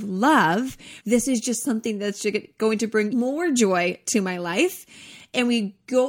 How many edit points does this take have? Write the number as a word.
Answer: two